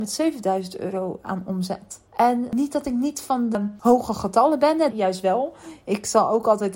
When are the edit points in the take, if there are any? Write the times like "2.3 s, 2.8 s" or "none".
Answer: 2.1 s, 4.9 s